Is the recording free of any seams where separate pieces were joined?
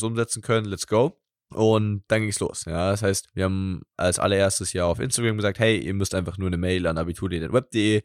yes; 0 cuts

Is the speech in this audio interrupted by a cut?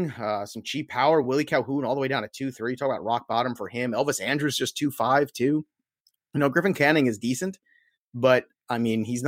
no; 0 cuts

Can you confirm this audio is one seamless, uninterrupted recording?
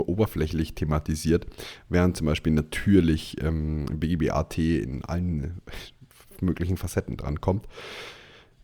yes; 0 cuts

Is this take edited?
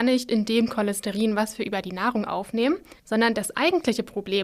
yes; 1 cut; at 3.0 s

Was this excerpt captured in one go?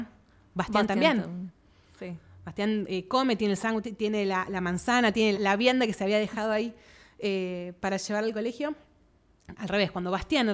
no; 2 cuts; at 5.3 s, 9.6 s

